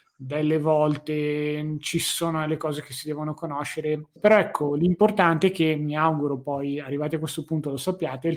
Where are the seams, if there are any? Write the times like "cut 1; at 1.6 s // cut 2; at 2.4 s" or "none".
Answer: cut 1; at 4.2 s